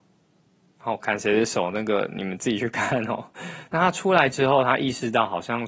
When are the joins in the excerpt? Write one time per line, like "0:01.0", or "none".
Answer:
0:03.7